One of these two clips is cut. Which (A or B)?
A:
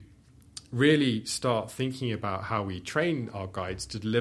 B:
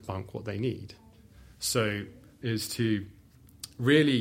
B